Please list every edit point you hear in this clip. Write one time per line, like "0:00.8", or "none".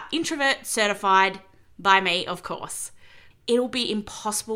0:03.3